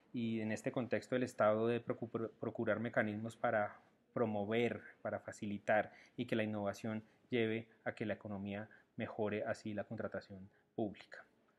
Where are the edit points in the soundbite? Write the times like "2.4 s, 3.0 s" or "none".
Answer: none